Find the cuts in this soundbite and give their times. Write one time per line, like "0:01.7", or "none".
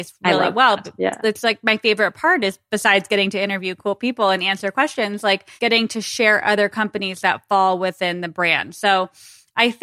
0:05.6

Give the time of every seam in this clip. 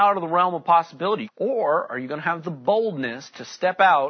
0:01.2

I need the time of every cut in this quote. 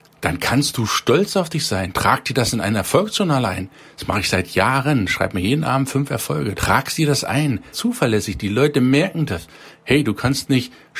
0:06.5
0:07.7

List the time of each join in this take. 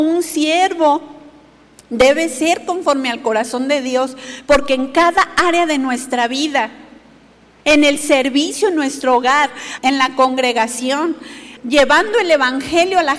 0:09.8
0:11.6

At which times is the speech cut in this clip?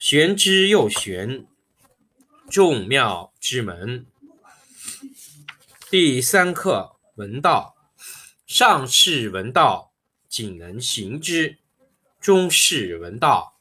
none

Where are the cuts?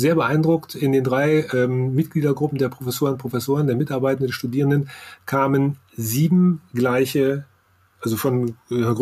none

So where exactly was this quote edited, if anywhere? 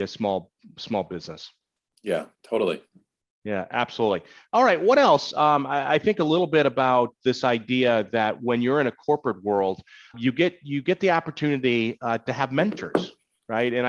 0:10.1

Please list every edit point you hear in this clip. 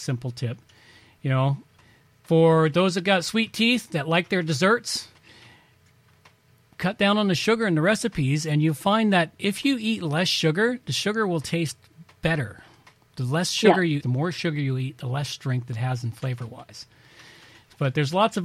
0:14.0

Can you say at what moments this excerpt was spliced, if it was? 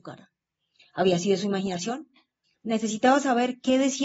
0:02.4

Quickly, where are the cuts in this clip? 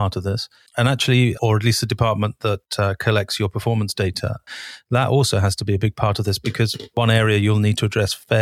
0:01.3

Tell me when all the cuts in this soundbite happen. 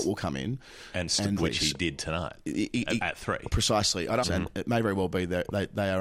0:01.4
0:04.2

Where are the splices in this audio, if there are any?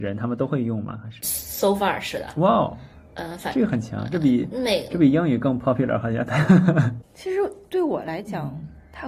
none

